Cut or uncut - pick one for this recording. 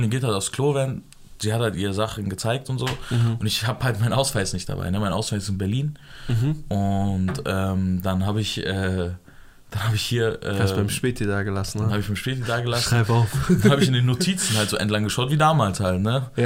uncut